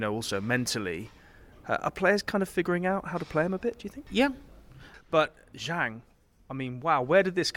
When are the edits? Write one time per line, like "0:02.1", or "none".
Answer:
0:04.9